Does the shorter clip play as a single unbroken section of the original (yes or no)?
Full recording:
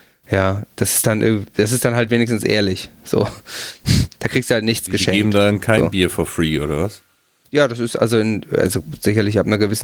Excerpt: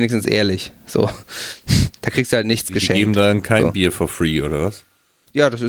yes